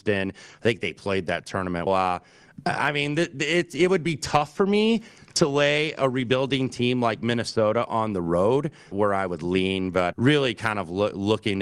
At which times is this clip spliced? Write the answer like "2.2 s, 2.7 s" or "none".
1.9 s, 8.9 s, 10.1 s